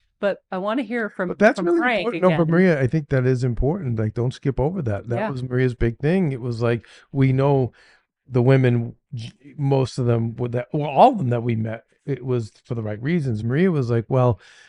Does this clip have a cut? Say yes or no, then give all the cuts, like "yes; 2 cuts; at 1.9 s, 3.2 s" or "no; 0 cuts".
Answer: no; 0 cuts